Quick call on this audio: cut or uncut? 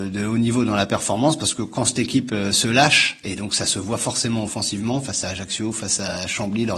uncut